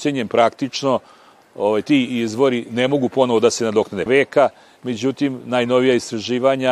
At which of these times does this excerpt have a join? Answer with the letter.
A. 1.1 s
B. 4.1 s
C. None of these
B